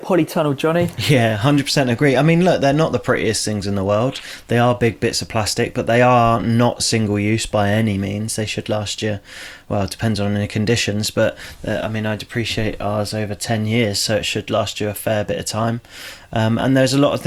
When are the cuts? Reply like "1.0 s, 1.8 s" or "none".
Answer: none